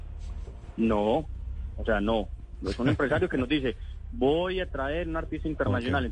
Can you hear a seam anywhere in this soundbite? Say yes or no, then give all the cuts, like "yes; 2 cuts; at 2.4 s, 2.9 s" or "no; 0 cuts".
no; 0 cuts